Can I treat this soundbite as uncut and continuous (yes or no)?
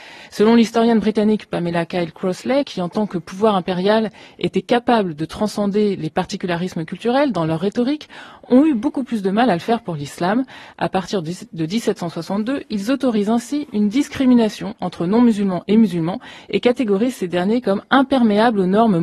no